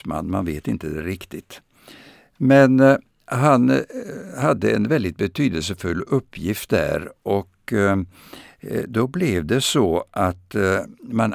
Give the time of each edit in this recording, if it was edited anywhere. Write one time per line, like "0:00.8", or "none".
none